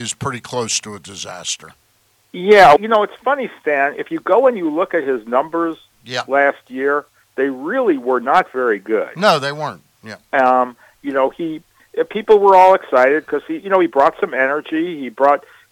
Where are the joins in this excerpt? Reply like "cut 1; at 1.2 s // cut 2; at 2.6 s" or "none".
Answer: cut 1; at 2.8 s